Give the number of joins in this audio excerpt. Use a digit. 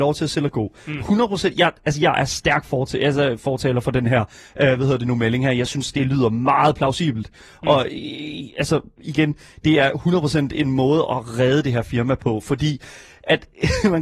0